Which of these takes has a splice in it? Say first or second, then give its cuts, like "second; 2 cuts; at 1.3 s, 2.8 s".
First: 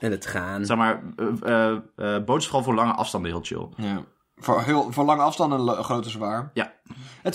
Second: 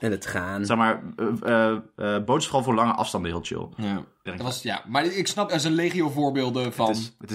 second; 2 cuts; at 4.3 s, 5.5 s